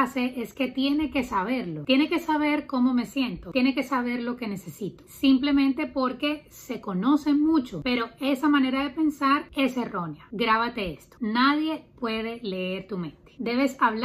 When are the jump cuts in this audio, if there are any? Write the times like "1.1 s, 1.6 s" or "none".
none